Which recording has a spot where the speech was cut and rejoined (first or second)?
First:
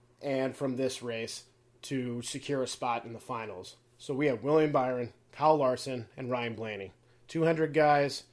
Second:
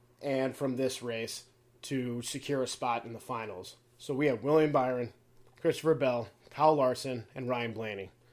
first